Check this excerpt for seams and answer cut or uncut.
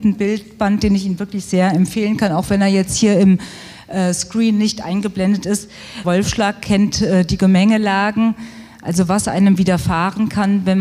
cut